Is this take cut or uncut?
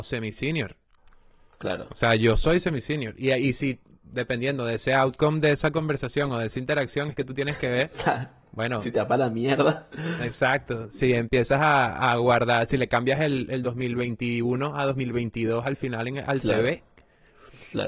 uncut